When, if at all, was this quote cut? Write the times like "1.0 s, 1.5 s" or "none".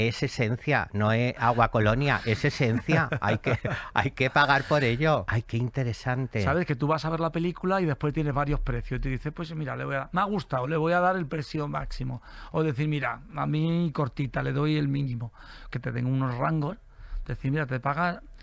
5.3 s